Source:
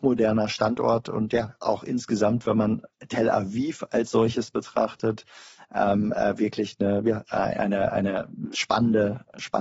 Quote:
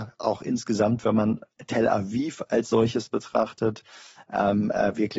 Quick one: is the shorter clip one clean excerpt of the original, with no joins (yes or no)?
yes